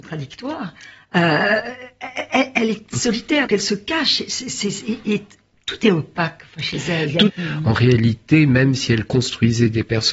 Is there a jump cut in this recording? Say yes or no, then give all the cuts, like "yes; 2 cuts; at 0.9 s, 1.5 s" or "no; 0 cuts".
yes; 2 cuts; at 3.5 s, 7.3 s